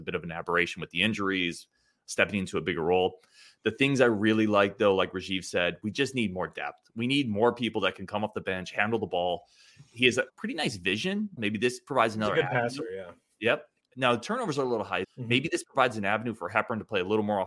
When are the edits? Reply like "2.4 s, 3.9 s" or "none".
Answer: 10.3 s, 11.4 s, 15.0 s